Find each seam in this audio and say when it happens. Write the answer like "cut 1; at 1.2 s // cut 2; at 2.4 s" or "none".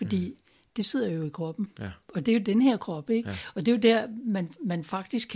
none